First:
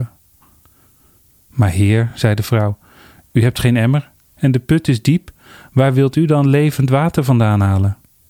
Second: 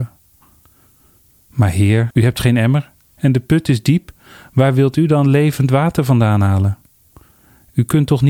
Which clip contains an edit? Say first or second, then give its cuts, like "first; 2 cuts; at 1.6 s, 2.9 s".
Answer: second; 1 cut; at 2.1 s